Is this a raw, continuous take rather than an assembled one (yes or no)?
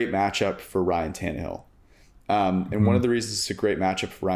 yes